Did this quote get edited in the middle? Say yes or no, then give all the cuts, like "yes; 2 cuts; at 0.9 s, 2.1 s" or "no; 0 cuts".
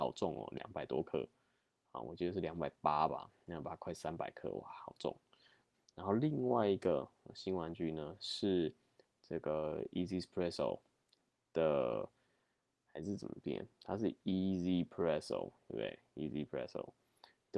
yes; 1 cut; at 5.7 s